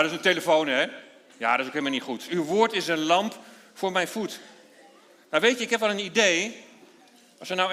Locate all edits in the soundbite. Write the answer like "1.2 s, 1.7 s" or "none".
2.3 s